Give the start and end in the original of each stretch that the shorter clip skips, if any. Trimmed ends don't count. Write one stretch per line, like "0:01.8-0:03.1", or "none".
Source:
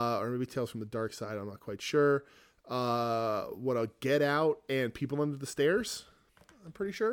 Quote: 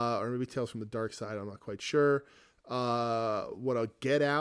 none